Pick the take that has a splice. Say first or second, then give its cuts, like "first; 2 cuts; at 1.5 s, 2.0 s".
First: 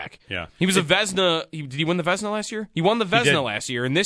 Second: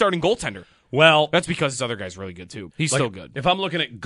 second; 1 cut; at 2.7 s